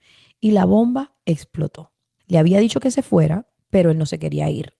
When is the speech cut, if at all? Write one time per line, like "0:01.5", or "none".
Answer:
0:02.2